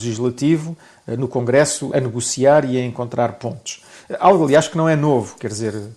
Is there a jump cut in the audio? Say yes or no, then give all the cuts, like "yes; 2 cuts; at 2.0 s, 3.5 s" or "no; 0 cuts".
yes; 1 cut; at 1.9 s